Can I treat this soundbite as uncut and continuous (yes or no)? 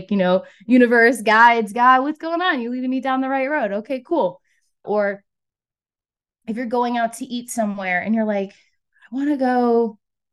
no